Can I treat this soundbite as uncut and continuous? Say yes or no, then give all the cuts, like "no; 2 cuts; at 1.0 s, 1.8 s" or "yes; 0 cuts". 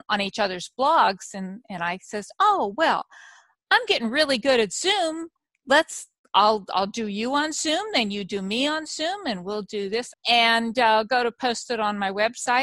no; 1 cut; at 10.1 s